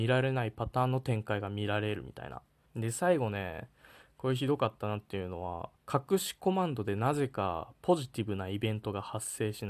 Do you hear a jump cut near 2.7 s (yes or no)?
yes